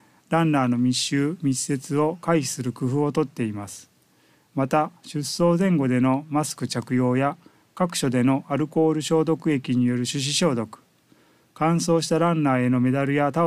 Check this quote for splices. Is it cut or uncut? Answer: uncut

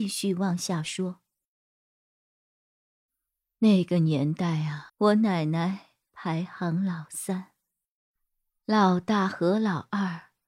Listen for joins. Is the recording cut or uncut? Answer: cut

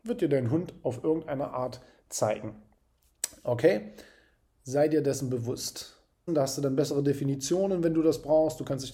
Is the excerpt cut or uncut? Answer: cut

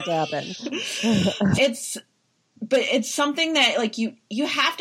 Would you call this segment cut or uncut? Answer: cut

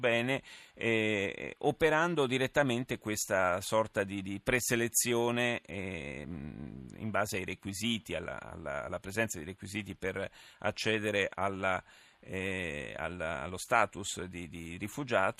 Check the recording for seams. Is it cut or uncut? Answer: uncut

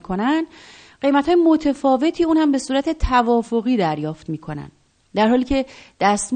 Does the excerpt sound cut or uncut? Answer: uncut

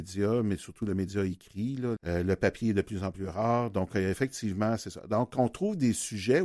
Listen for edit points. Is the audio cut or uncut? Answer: cut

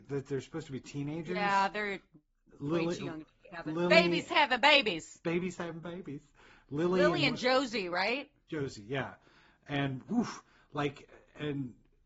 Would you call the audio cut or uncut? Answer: uncut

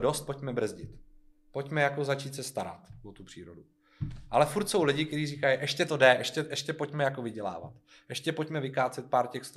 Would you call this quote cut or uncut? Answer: uncut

